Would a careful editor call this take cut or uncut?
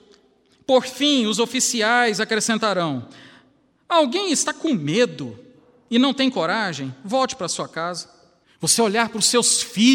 cut